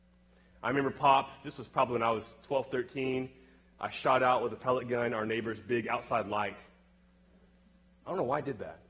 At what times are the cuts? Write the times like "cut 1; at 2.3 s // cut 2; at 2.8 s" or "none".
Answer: none